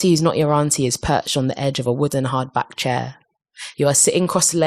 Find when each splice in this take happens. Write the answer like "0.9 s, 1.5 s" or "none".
3.7 s